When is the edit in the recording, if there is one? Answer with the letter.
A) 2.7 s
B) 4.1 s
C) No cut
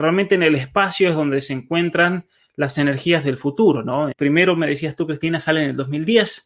B